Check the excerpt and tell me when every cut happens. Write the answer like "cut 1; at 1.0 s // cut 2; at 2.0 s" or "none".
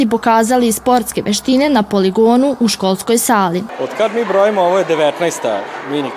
none

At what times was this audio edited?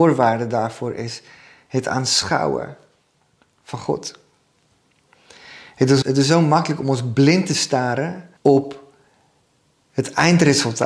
cut 1; at 6.0 s // cut 2; at 8.4 s

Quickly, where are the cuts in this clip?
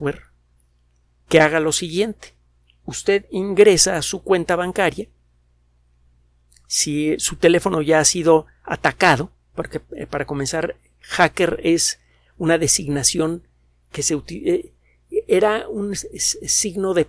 cut 1; at 9.5 s

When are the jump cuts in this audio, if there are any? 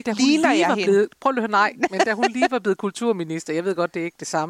none

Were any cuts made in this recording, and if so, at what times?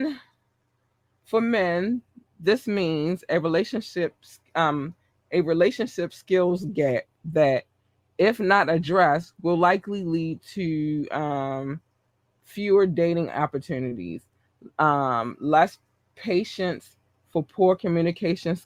none

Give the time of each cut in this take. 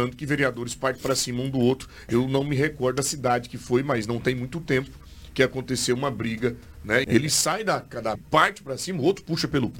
cut 1; at 7.0 s // cut 2; at 8.2 s

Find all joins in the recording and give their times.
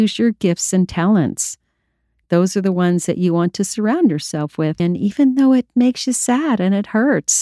cut 1; at 2.2 s // cut 2; at 4.8 s

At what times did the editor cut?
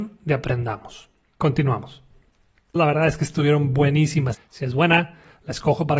cut 1; at 2.8 s // cut 2; at 4.3 s

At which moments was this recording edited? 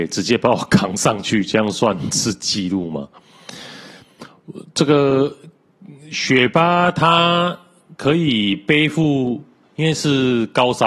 none

